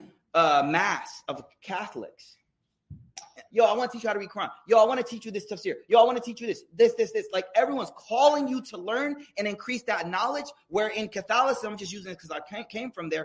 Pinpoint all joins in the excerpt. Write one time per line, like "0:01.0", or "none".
0:03.5